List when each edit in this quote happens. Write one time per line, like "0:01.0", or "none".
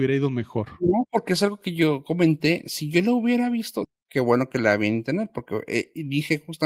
0:03.8